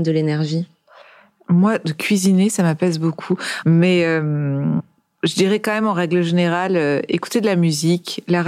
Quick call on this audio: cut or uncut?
cut